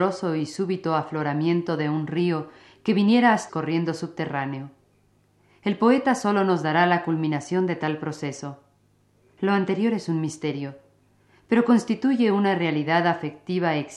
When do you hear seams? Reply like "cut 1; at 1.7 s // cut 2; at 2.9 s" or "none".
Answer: cut 1; at 3.5 s